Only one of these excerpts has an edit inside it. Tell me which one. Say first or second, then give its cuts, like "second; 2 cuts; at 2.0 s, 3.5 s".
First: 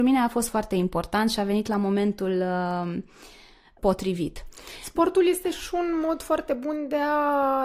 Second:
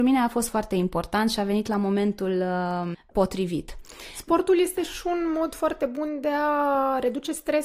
second; 1 cut; at 2.9 s